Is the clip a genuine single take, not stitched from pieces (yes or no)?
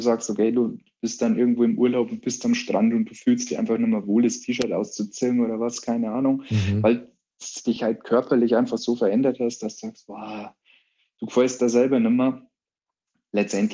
yes